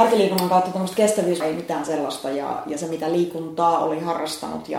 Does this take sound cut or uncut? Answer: cut